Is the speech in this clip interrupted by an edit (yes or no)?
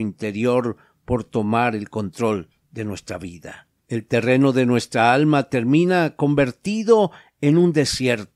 yes